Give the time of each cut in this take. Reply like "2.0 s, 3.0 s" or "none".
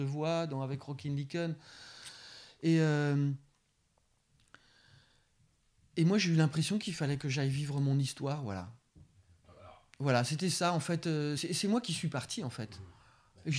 11.4 s